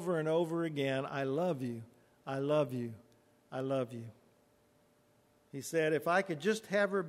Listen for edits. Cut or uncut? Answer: cut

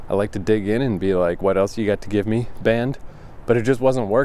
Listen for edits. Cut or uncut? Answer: uncut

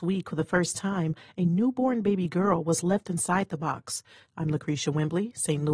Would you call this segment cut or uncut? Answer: cut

